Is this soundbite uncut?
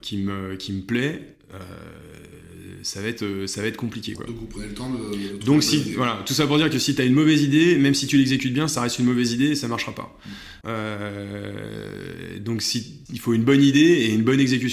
no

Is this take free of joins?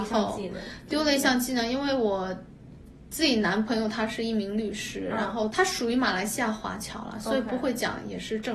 no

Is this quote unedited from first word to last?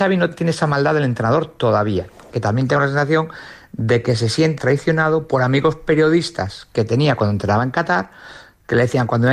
no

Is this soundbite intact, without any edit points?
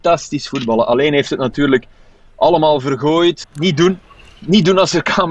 no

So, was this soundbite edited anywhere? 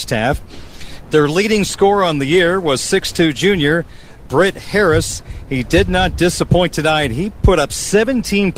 yes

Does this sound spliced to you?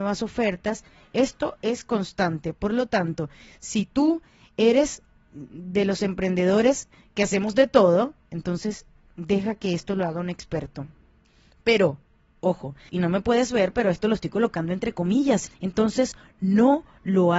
yes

